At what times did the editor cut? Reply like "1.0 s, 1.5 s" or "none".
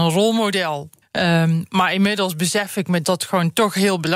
1.0 s, 3.0 s